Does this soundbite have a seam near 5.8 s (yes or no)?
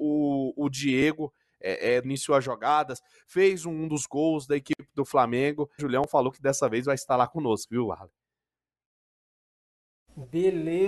yes